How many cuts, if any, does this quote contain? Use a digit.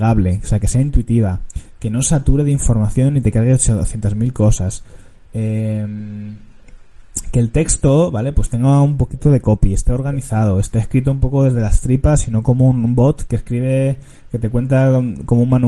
0